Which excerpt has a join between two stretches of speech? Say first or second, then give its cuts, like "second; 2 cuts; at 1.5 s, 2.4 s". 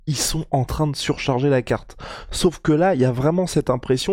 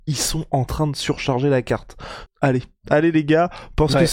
second; 1 cut; at 2.3 s